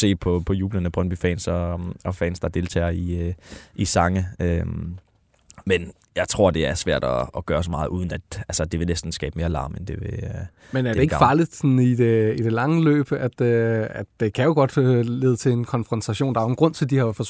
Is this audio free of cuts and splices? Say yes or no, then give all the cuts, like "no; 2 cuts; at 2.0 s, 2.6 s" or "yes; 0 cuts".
yes; 0 cuts